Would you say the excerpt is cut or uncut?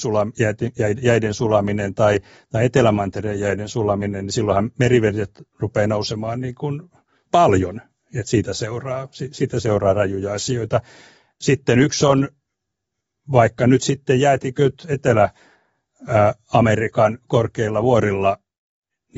uncut